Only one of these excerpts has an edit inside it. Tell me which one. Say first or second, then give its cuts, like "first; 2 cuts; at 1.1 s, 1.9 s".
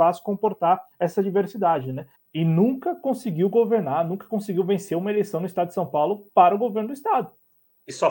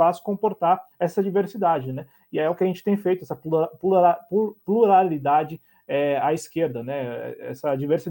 first; 1 cut; at 2.1 s